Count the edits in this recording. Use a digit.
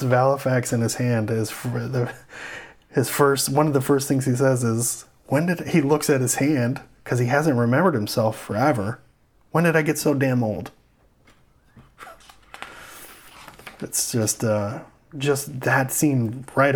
0